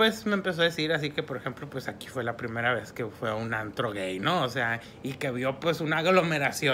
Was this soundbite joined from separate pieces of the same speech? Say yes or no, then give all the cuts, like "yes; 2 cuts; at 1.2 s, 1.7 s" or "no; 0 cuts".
no; 0 cuts